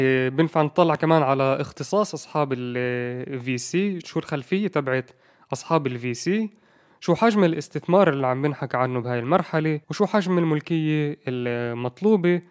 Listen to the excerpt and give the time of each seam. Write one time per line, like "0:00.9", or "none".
0:04.0
0:09.8